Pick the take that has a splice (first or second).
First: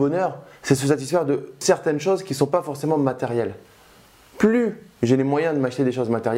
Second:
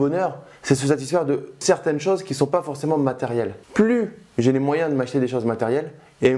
second